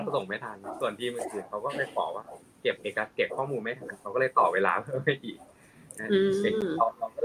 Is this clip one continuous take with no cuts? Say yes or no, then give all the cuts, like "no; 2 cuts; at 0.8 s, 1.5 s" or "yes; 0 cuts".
yes; 0 cuts